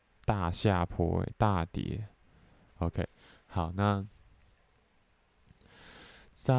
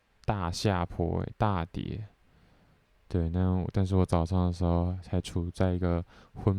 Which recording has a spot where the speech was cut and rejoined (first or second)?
first